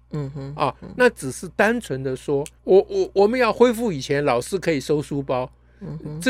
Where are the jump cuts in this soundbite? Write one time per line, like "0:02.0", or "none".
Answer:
0:02.6